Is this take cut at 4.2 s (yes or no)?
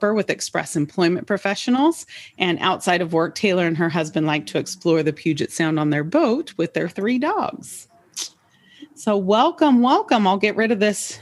no